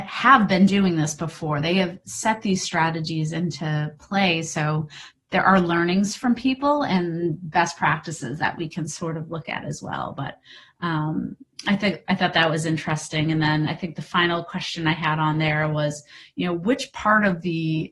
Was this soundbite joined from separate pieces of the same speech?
no; 0 cuts

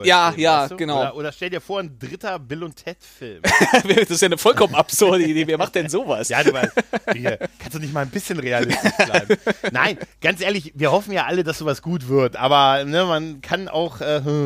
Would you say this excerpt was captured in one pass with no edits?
yes; 0 cuts

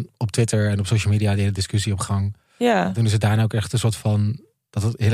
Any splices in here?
no; 0 cuts

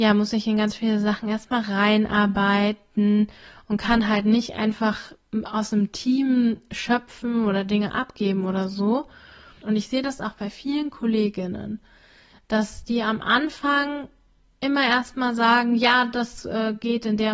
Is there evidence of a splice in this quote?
yes; 1 cut; at 9.6 s

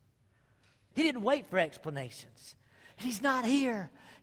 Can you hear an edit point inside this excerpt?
yes; 2 cuts; at 0.9 s, 2.9 s

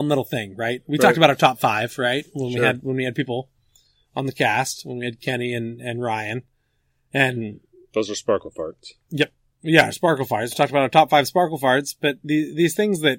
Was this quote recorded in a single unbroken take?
yes; 0 cuts

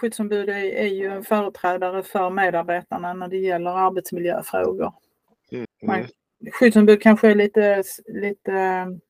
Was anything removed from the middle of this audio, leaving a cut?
yes; 1 cut; at 5.7 s

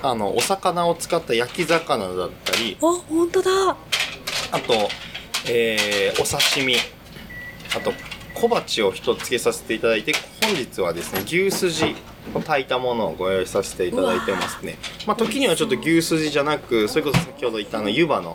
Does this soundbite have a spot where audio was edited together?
yes; 1 cut; at 9.2 s

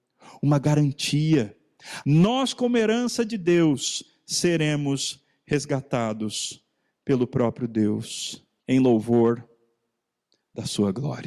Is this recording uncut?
no; 2 cuts; at 2.0 s, 8.6 s

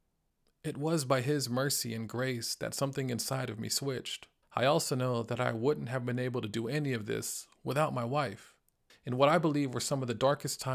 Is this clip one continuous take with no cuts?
no; 2 cuts; at 4.4 s, 8.9 s

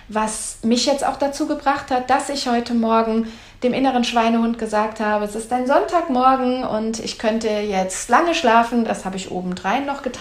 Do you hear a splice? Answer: no; 0 cuts

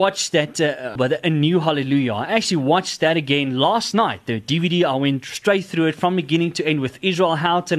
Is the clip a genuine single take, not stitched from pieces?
no; 1 cut; at 1.0 s

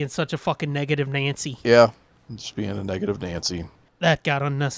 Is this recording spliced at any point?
yes; 1 cut; at 3.9 s

